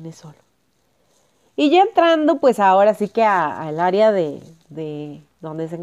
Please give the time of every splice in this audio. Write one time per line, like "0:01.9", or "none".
none